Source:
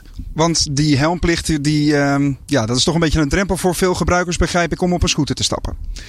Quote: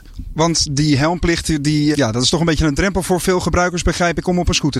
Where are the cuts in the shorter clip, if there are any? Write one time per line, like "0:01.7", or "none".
0:01.9

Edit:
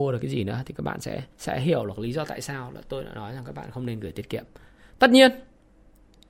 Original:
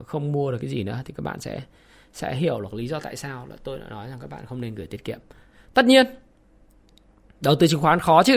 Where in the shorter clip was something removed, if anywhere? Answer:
0:01.3

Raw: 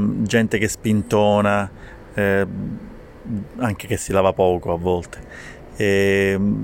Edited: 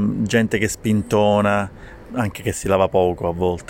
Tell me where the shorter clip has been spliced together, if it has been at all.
0:02.1

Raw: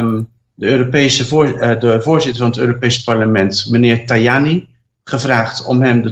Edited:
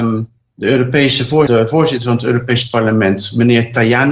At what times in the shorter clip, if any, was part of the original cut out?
0:01.5

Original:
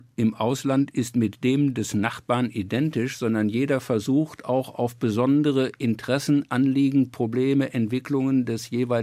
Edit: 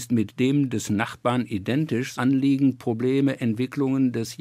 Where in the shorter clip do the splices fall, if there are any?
0:02.1

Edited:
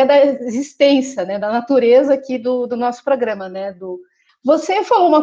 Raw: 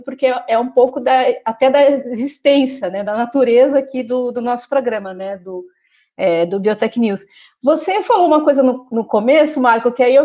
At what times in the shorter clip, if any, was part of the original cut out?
0:04.3

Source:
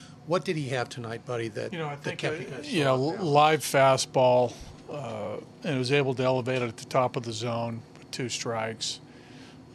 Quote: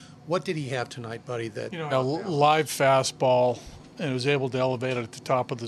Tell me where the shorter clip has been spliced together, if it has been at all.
0:01.9
0:03.9

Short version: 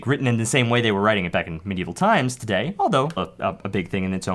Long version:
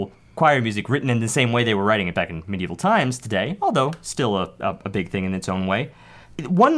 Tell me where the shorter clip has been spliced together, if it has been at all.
0:03.2

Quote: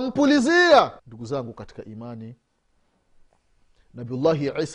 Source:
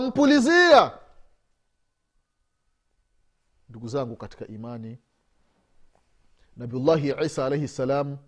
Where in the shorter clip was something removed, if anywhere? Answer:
0:01.0

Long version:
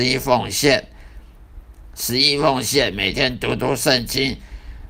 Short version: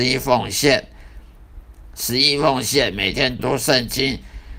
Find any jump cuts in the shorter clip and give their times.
0:03.4

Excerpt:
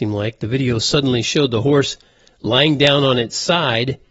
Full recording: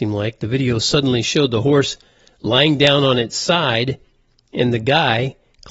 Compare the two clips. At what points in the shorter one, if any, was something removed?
none

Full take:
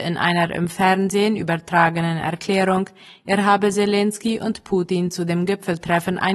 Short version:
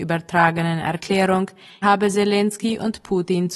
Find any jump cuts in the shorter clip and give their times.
0:01.8

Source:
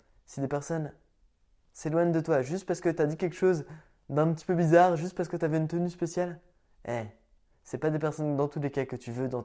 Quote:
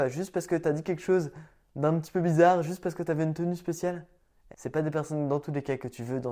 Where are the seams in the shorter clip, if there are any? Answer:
0:04.5

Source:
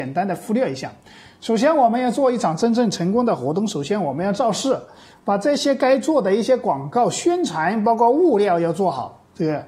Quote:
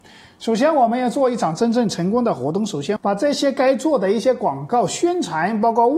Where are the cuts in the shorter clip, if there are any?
0:03.0

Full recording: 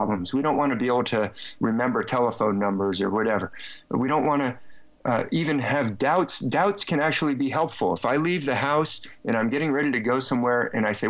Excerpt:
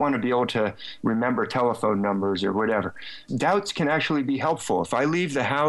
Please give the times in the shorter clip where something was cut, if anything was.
0:03.3

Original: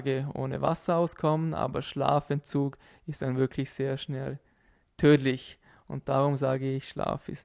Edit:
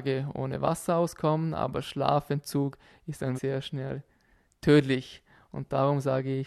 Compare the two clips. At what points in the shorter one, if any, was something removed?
0:03.4

